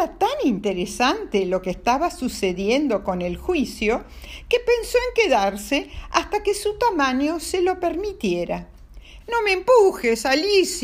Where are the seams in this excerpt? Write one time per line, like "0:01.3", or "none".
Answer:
0:09.2